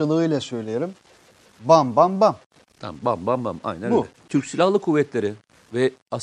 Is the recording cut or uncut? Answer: cut